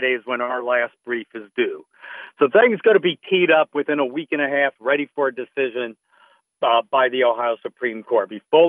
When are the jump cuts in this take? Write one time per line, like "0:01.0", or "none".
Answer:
0:04.8